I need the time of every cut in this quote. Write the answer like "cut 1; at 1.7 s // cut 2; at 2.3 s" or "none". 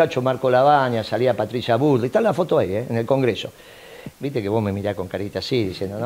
cut 1; at 4.1 s